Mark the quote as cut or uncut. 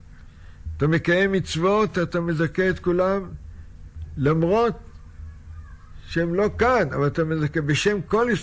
uncut